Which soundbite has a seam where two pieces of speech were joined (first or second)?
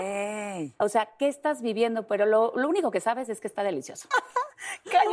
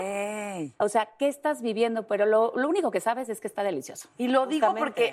first